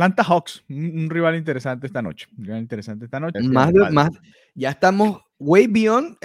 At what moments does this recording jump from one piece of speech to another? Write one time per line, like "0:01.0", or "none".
0:03.3